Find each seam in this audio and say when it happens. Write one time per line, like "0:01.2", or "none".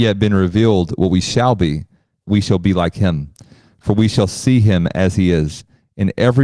0:02.2